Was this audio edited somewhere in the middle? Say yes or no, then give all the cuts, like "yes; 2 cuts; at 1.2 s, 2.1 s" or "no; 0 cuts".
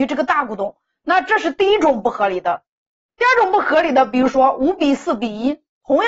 no; 0 cuts